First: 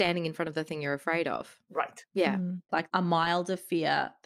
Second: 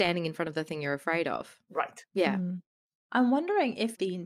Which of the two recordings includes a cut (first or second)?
first